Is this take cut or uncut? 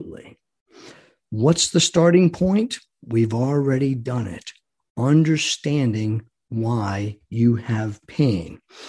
uncut